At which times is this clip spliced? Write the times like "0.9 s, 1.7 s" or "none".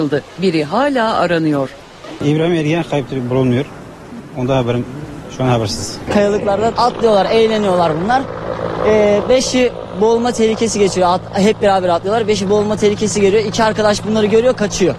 none